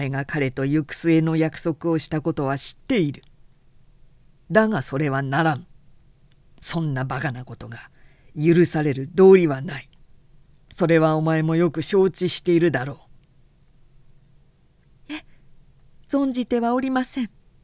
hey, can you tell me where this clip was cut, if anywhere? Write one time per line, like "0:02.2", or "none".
0:15.1